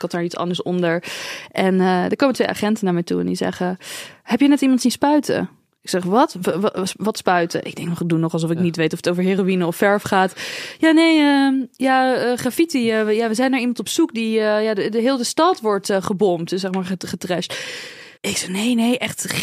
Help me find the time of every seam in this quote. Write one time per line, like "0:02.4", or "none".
0:18.2

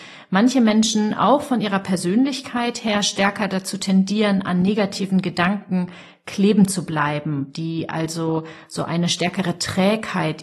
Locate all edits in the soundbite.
none

